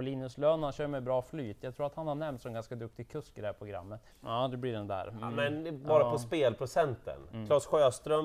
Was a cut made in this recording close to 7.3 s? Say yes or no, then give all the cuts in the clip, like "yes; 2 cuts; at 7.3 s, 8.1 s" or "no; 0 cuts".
no; 1 cut; at 4.1 s